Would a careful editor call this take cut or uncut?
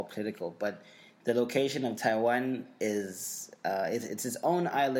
uncut